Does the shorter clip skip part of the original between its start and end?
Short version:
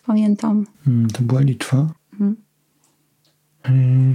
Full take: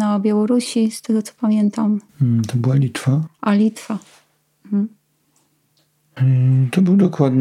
yes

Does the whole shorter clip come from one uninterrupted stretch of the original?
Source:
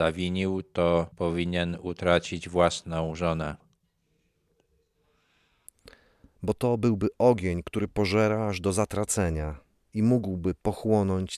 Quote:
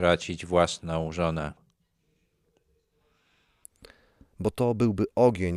yes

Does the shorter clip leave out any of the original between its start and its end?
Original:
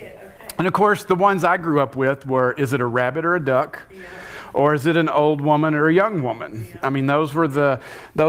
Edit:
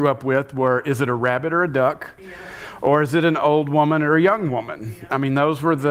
no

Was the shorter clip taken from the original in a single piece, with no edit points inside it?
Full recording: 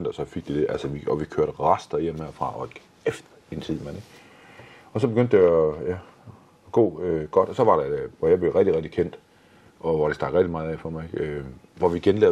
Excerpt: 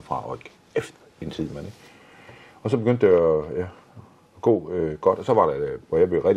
yes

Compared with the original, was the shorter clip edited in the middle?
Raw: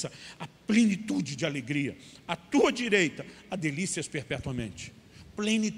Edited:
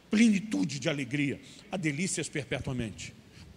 yes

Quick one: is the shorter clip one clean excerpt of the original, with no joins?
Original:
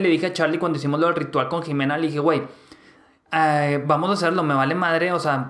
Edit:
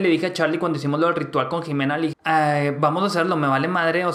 no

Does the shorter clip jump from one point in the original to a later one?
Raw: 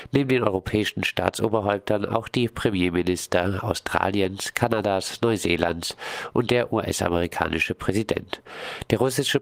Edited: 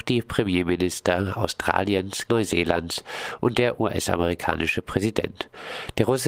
yes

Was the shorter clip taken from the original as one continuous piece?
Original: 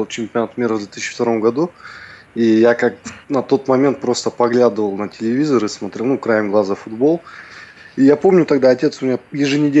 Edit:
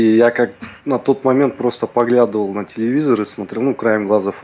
yes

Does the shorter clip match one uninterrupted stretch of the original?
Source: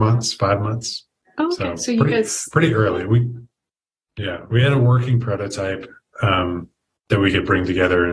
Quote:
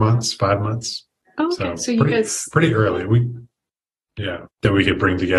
no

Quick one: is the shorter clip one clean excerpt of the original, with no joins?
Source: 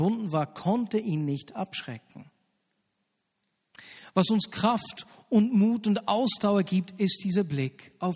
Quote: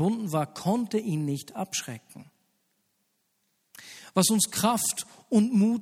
yes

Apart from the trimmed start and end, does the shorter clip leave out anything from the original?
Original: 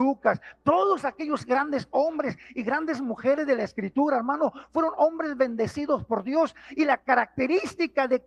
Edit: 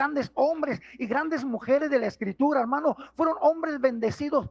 no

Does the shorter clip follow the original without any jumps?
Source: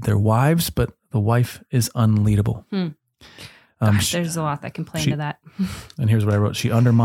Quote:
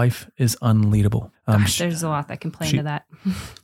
no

